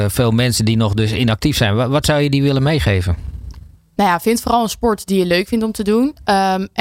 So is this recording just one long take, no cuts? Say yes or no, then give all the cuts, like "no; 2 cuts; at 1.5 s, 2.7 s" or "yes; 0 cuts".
yes; 0 cuts